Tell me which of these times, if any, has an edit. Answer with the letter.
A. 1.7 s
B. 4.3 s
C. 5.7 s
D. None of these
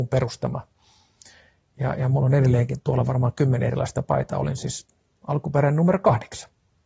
D